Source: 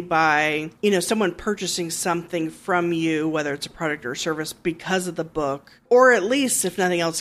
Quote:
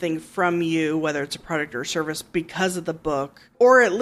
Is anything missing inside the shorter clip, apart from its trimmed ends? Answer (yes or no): no